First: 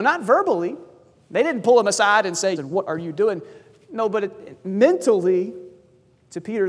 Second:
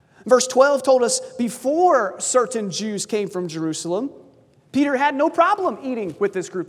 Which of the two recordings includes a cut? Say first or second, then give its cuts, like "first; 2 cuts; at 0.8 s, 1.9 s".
first; 1 cut; at 2.6 s